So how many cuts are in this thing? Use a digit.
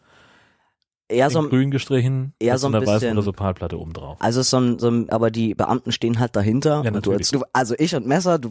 2